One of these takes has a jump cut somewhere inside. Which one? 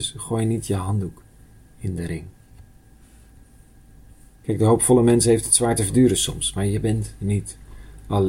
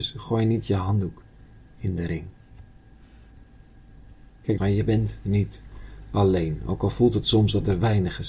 second; 1 cut; at 4.6 s

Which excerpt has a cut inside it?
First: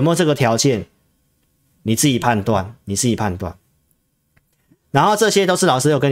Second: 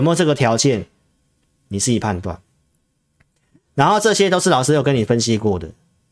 second; 1 cut; at 1.7 s

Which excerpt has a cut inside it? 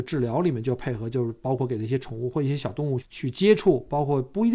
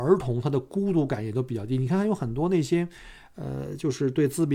first; 1 cut; at 3.0 s

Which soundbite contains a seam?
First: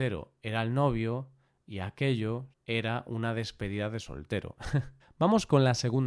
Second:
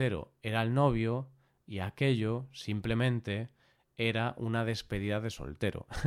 first; 2 cuts; at 2.5 s, 5.0 s

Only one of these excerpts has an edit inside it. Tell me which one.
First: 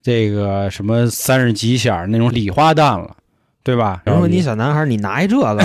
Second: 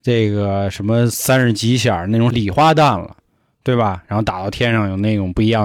first; 1 cut; at 4.1 s

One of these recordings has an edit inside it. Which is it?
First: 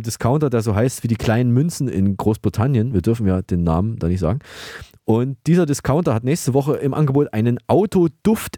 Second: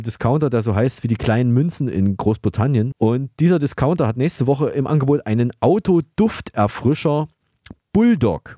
second; 1 cut; at 2.9 s

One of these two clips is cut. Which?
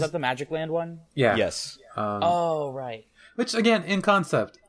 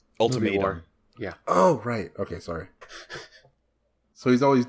second; 1 cut; at 2.8 s

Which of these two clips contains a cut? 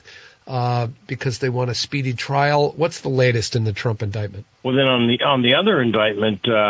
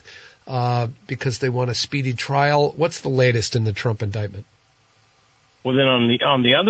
first; 1 cut; at 4.5 s

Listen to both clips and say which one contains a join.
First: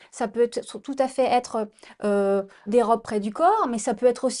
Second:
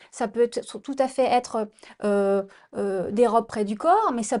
first; 1 cut; at 2.7 s

